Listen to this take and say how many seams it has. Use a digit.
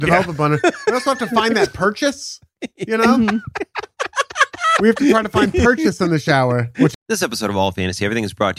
1